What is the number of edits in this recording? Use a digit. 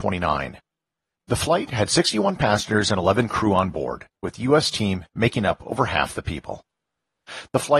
1